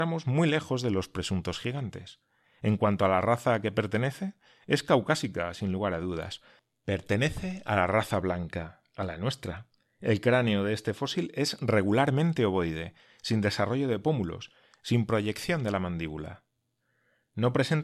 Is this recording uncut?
yes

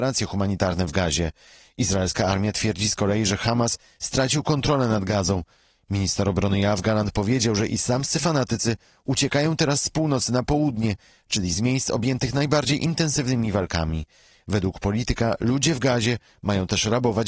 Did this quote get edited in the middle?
no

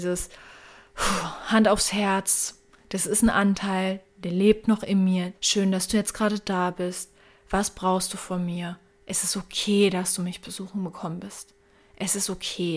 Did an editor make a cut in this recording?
yes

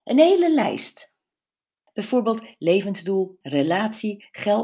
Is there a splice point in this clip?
yes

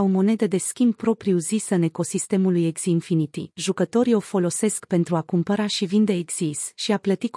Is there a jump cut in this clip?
no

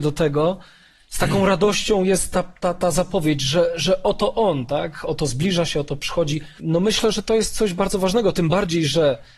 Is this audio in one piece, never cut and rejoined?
no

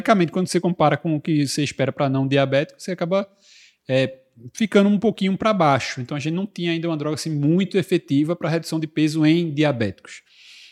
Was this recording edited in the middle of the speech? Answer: no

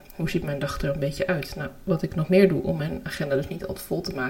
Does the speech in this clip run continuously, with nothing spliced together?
yes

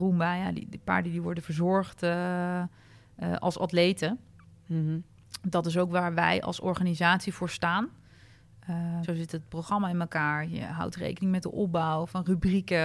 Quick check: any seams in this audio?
yes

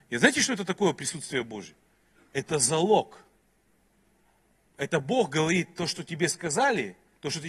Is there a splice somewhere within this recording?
no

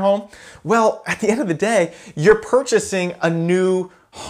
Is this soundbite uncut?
yes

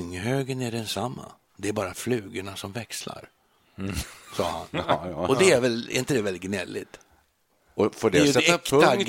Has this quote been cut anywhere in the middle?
no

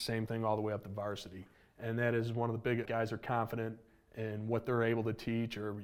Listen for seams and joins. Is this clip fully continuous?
no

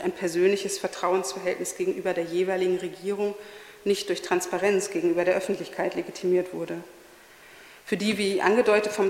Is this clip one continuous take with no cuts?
yes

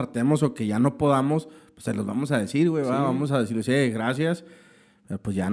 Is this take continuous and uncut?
yes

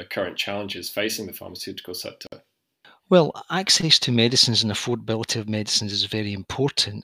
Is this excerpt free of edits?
yes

